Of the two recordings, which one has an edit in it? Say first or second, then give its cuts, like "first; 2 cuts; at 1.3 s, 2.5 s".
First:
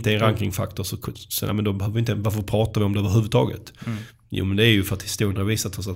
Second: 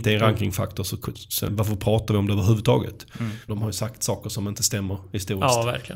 second; 2 cuts; at 1.5 s, 3.5 s